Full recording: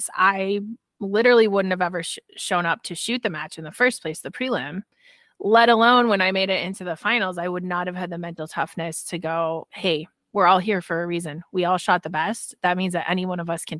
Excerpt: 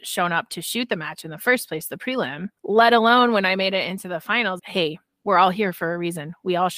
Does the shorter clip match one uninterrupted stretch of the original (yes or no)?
no